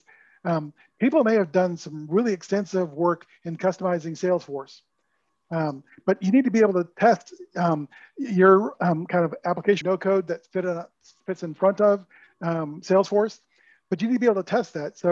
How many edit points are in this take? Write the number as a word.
one